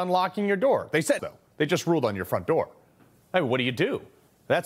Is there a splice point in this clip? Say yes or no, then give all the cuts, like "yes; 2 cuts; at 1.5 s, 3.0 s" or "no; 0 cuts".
yes; 1 cut; at 1.2 s